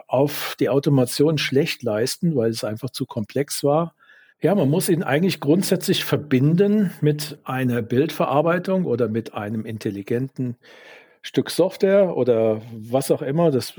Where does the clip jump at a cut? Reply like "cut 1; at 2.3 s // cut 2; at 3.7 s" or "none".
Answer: cut 1; at 4.3 s